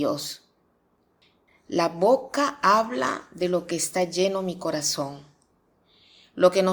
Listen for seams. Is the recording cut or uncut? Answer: cut